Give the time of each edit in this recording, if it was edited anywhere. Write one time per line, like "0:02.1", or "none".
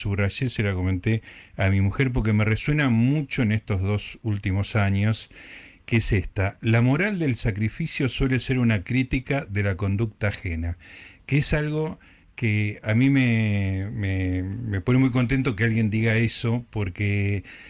none